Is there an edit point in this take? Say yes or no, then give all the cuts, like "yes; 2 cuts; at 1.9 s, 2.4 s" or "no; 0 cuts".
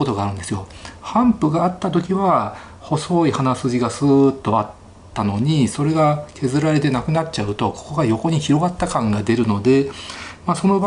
no; 0 cuts